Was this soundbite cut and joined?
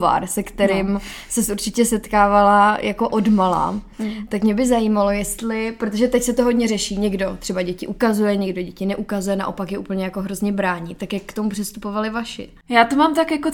no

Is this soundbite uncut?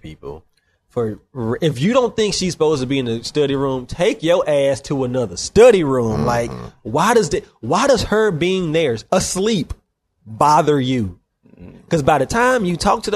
yes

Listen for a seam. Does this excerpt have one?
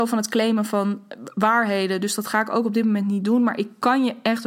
no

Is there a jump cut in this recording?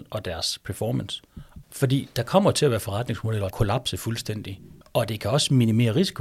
yes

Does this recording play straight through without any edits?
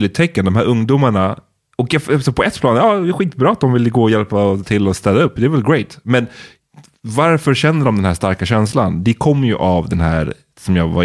yes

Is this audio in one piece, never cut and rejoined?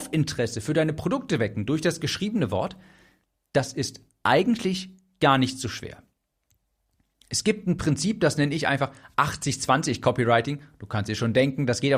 yes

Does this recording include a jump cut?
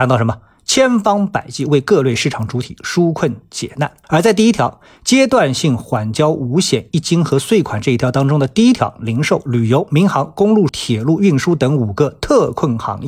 yes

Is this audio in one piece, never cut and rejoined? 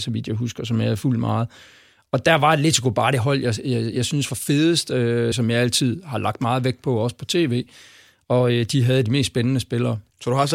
no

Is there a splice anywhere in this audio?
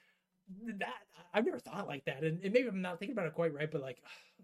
no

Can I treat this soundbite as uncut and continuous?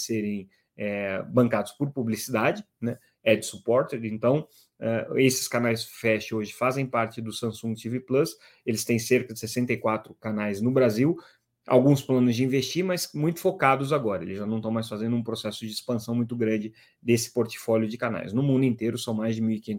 yes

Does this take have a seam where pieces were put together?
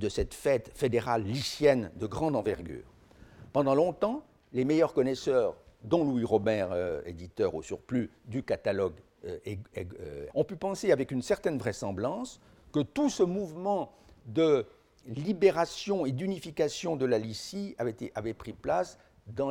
yes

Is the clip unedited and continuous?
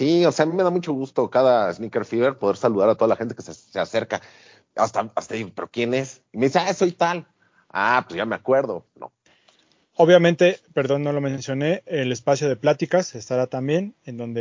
no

